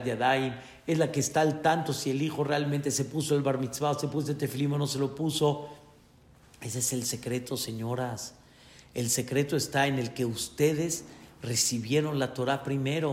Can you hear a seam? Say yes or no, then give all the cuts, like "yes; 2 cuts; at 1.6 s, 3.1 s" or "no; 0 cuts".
no; 0 cuts